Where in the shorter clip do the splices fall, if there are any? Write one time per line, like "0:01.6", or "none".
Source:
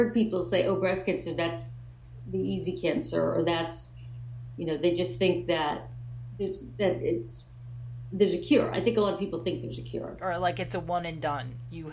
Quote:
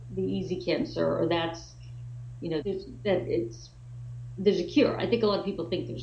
0:02.6